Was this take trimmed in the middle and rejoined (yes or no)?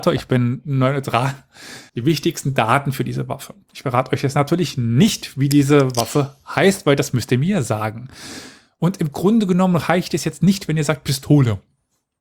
yes